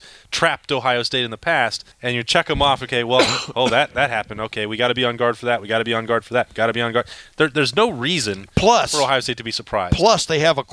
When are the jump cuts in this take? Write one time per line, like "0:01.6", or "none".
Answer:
0:01.9